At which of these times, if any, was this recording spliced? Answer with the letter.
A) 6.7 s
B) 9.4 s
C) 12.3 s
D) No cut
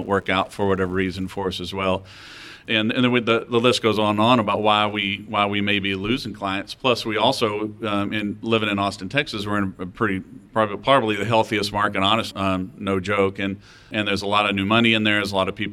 C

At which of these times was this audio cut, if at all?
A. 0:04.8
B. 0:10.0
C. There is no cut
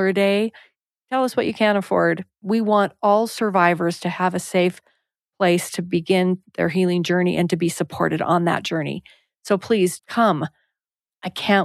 B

